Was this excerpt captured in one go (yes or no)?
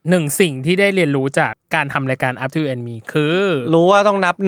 no